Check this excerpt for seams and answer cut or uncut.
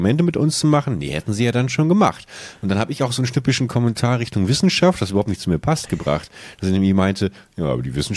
uncut